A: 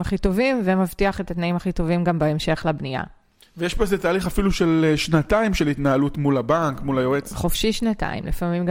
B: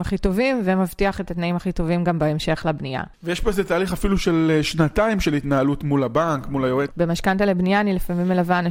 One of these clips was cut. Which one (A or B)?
B